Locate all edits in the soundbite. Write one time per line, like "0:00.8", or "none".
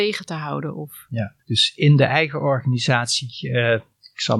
0:01.4